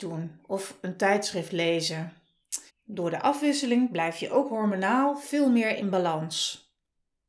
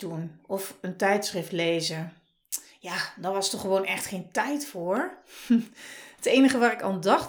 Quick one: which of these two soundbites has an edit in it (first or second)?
first